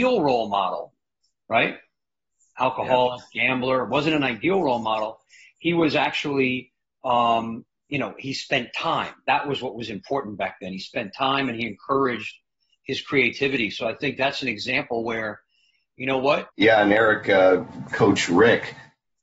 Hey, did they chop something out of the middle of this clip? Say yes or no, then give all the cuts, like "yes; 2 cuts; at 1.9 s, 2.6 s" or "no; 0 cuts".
yes; 2 cuts; at 16.5 s, 17.9 s